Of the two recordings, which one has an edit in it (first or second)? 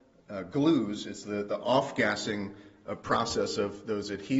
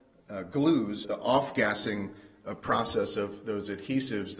second